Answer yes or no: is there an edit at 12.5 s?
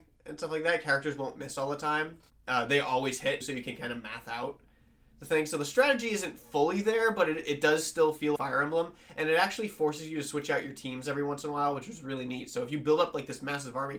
no